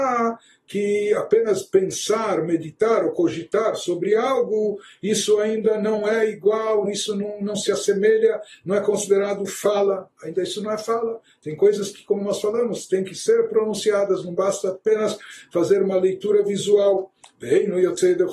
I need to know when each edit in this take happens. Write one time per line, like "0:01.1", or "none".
0:06.9